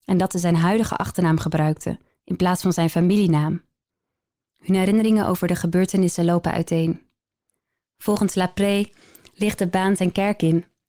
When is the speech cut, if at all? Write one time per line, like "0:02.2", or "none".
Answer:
0:04.4